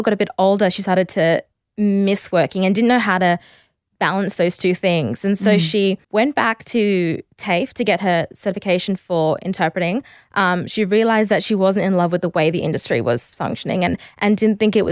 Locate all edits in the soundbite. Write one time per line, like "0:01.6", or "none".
0:06.0